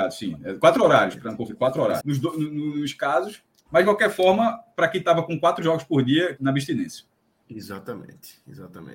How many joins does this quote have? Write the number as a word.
three